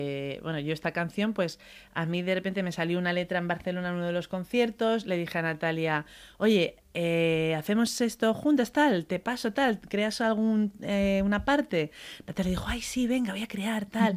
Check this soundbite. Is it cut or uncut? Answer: uncut